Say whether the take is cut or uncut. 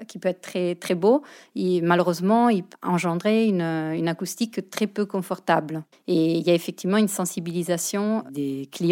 cut